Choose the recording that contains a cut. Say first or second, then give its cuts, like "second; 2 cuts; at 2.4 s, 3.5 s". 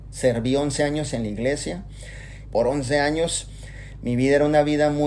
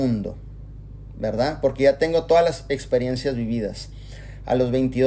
first; 1 cut; at 2.4 s